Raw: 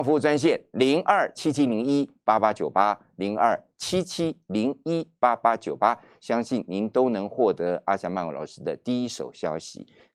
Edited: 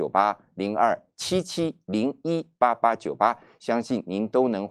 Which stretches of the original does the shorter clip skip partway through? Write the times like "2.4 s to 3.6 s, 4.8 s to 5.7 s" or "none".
none